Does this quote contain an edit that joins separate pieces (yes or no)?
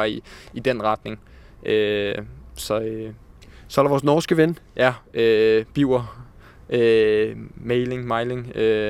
no